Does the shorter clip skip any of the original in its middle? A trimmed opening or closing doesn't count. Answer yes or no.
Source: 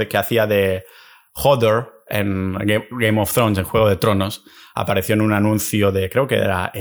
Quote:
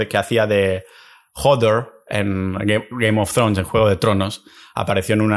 no